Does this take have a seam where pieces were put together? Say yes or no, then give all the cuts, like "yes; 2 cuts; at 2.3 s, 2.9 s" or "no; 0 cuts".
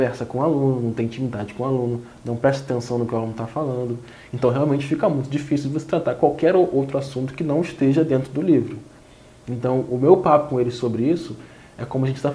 no; 0 cuts